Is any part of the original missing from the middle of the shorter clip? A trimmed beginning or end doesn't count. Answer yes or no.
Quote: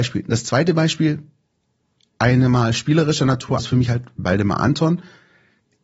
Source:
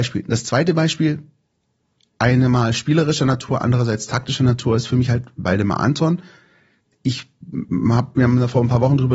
yes